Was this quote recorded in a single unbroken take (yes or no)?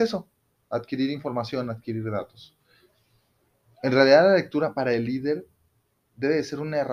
yes